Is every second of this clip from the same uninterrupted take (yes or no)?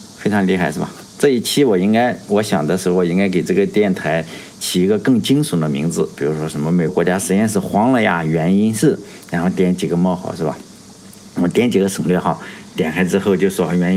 no